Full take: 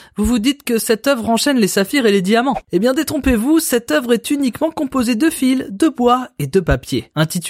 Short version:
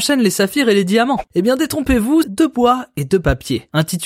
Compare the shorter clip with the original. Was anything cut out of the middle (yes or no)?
yes